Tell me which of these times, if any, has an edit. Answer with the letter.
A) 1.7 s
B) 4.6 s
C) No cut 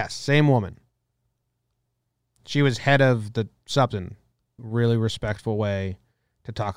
B